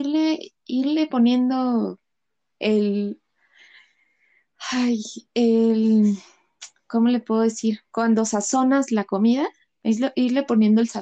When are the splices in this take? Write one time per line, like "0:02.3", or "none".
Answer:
0:05.3